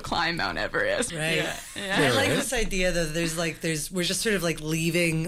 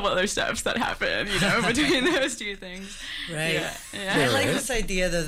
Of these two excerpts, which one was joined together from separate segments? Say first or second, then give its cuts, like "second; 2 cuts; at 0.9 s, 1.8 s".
first; 1 cut; at 1.1 s